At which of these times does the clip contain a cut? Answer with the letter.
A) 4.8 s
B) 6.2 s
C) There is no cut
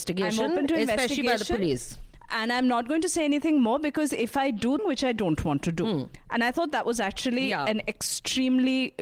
A